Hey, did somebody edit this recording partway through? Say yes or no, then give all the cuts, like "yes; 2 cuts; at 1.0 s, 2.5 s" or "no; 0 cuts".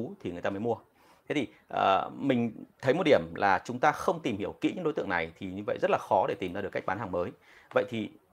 no; 0 cuts